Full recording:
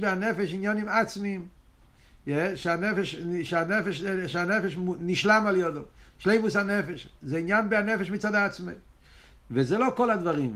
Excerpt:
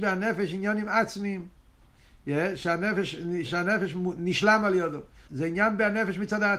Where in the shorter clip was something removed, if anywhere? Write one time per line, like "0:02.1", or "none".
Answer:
0:03.4
0:05.3

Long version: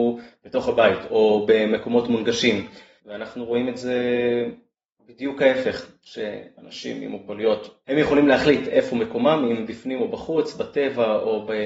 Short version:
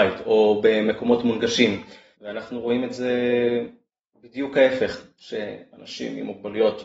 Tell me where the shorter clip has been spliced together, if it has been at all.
none

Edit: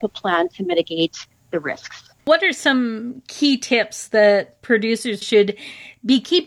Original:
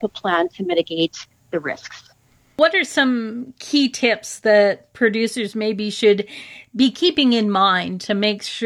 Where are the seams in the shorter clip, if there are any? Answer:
0:02.2
0:05.2

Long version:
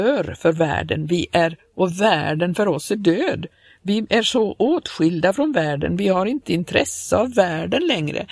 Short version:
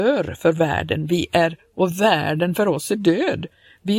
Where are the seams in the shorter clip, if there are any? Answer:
none

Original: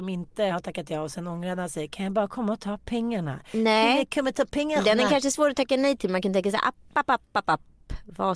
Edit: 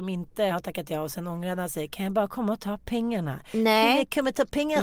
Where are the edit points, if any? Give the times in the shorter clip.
none

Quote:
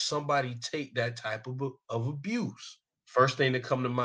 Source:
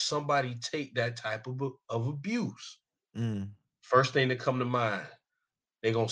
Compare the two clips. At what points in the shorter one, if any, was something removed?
0:02.9

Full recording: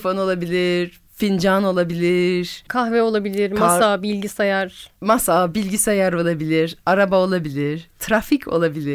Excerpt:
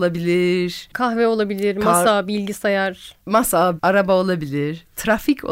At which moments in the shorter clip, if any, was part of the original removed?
0:03.8

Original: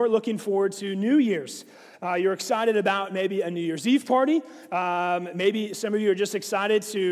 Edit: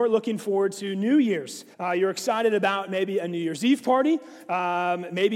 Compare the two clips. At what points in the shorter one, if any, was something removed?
0:01.7

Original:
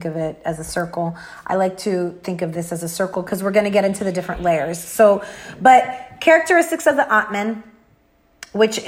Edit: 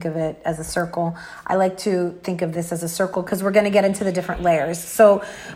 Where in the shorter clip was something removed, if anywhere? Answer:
none

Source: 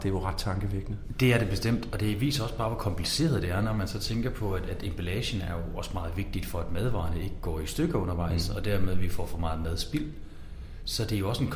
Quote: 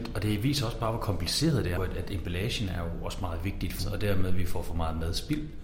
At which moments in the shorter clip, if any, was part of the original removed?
0:01.8
0:03.8

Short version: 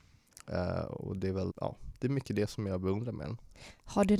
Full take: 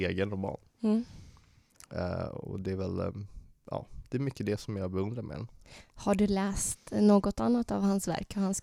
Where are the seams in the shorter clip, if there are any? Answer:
0:01.5

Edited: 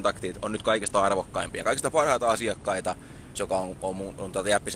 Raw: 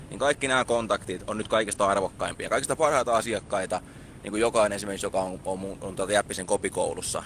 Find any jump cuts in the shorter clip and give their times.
0:03.4

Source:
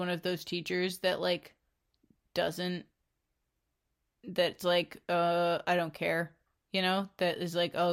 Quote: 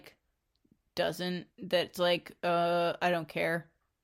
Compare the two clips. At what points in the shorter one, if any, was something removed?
0:01.5

